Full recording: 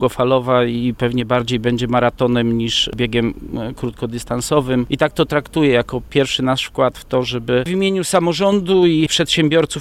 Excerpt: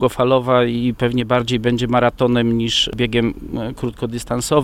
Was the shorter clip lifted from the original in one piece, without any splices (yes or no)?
yes